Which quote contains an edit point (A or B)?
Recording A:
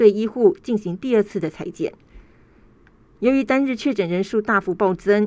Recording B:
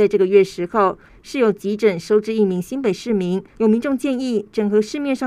B